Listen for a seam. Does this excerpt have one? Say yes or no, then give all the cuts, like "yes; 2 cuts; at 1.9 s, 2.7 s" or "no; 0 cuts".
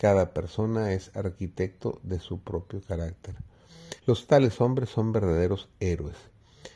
yes; 1 cut; at 4.0 s